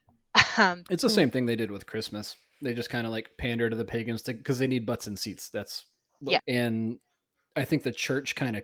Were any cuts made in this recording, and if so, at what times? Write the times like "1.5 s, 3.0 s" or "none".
6.4 s